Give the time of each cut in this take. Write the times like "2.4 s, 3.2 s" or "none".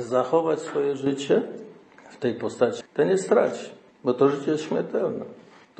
2.8 s

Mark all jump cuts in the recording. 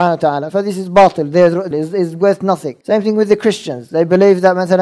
1.7 s, 2.8 s

